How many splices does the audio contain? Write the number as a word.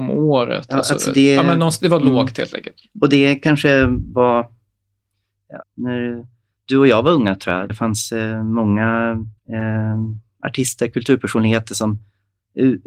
three